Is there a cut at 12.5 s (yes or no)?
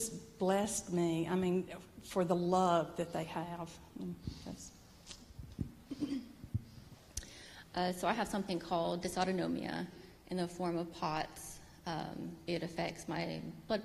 yes